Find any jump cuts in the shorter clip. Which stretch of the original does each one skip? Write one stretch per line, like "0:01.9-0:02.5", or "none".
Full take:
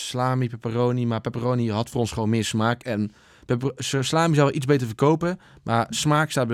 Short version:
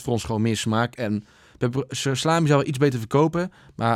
none